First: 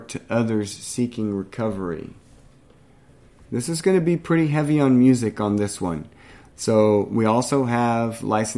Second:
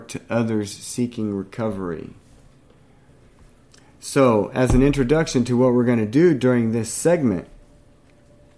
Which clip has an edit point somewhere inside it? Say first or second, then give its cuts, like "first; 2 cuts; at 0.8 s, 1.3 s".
first; 2 cuts; at 3.4 s, 6.5 s